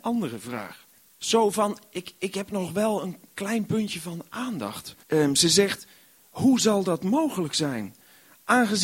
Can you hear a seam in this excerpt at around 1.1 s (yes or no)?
yes